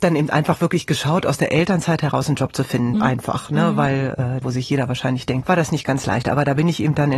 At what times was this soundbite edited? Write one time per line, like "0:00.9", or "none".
0:02.9
0:04.4
0:05.4